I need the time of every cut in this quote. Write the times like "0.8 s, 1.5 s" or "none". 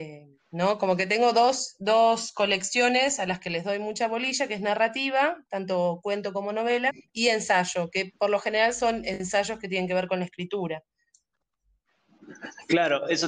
6.9 s